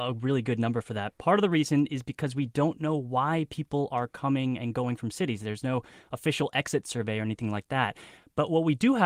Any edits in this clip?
no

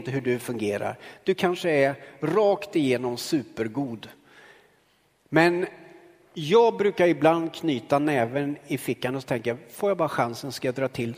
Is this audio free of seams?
yes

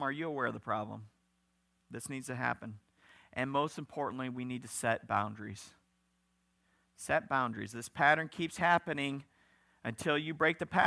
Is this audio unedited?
yes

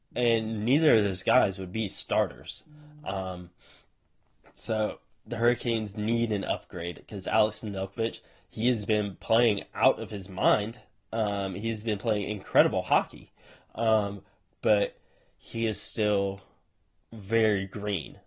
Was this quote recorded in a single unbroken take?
yes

